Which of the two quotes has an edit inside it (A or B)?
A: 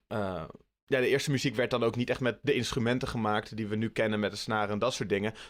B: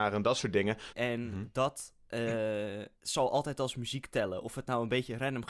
B